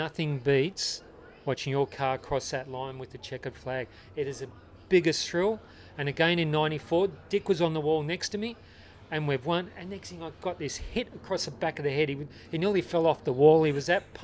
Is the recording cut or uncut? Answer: uncut